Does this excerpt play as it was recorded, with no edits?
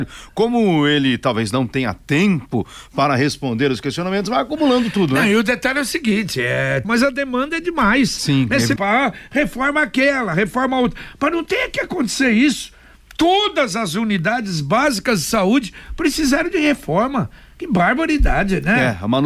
no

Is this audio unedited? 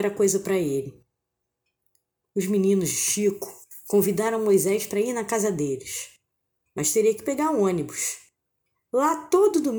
yes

